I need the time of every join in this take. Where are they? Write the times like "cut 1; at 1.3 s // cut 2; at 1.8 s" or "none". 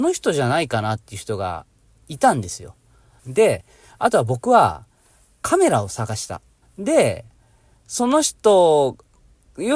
cut 1; at 3.2 s // cut 2; at 6.6 s